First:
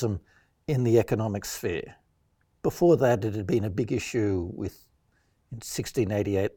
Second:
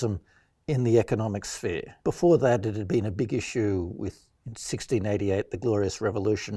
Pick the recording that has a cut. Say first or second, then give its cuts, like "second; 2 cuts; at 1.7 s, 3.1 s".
second; 2 cuts; at 2.0 s, 4.4 s